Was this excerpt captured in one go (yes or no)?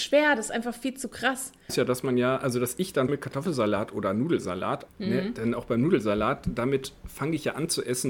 no